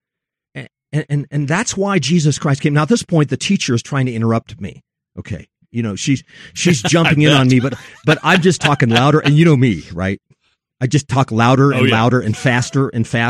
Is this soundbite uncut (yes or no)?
yes